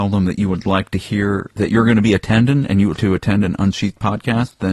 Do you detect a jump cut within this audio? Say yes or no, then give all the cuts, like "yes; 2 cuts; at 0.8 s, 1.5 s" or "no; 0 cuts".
yes; 1 cut; at 3.0 s